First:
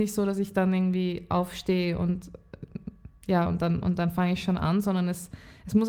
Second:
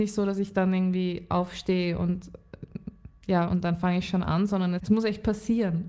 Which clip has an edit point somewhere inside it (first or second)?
second